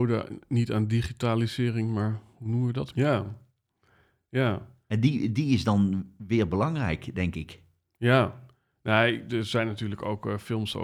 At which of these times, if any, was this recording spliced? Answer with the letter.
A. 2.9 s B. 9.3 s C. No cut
A